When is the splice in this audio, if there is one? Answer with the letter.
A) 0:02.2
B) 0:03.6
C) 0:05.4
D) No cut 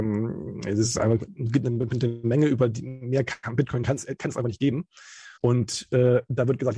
C